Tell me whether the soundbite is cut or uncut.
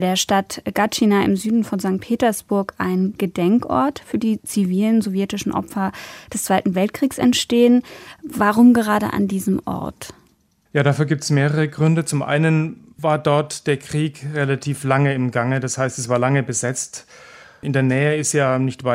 uncut